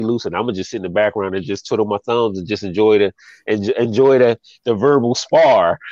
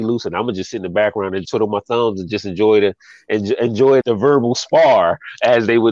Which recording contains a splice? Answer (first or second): second